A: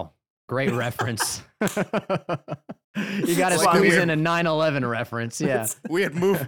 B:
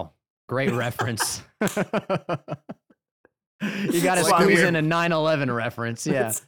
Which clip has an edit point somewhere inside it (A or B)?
A